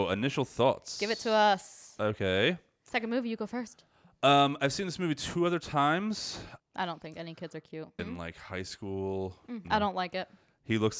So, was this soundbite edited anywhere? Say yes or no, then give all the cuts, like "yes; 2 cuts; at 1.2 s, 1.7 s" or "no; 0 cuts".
yes; 3 cuts; at 6.6 s, 8.0 s, 9.6 s